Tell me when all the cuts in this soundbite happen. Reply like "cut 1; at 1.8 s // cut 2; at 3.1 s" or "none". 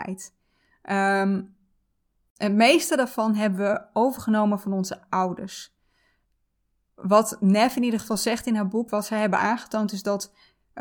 none